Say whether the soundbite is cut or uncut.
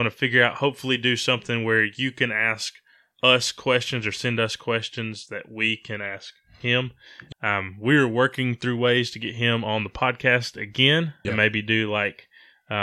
cut